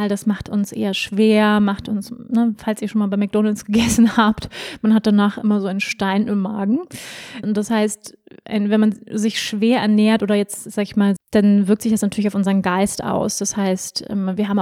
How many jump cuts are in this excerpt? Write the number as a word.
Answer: two